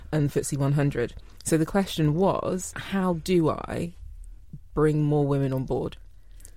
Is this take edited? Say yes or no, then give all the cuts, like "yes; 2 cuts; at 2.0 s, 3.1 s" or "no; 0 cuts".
yes; 1 cut; at 2.7 s